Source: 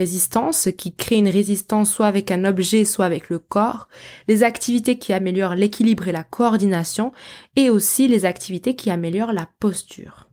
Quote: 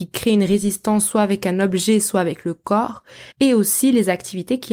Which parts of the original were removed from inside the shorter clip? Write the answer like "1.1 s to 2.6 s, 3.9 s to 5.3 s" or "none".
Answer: 4.2 s to 7.5 s

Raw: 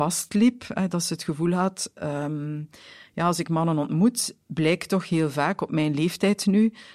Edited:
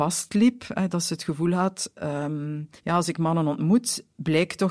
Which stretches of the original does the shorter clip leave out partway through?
2.8 s to 3.1 s

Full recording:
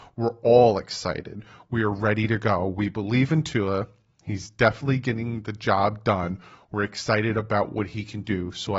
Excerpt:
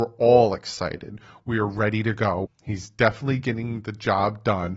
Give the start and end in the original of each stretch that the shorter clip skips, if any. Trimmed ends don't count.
2.7 s to 4.0 s

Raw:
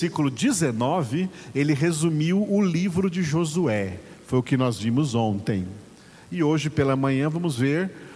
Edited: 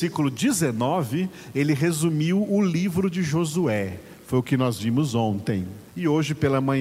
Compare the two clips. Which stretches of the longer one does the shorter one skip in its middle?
5.9 s to 6.2 s

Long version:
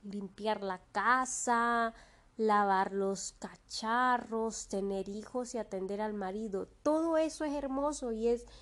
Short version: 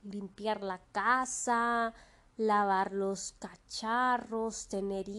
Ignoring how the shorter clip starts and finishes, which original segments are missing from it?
none

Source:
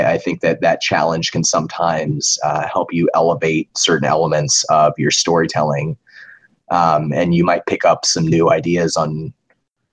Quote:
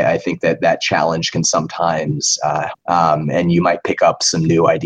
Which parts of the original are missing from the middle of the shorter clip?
2.7 s to 6.5 s

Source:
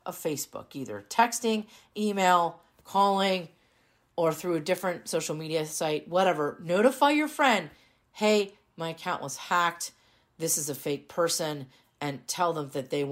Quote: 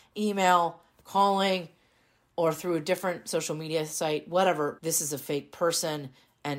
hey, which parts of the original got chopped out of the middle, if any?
6.6 s to 10.3 s

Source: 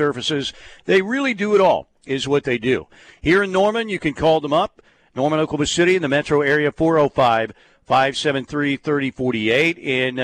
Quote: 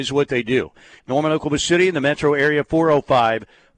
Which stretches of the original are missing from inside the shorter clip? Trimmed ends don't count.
3.1 s to 5.1 s

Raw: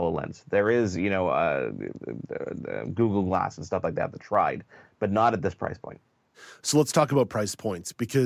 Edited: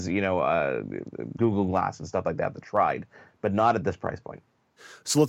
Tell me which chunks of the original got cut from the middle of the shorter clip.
2.3 s to 3.0 s

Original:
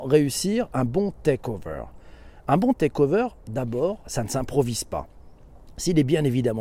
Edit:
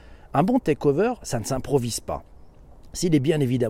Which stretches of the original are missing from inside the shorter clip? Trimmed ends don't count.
3.3 s to 4.0 s

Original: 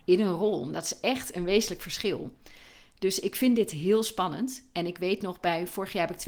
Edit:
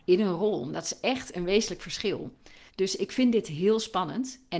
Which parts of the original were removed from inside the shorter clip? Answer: 2.7 s to 2.9 s

